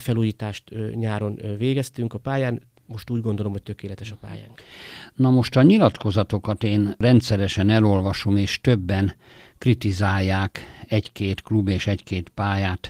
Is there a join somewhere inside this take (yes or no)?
no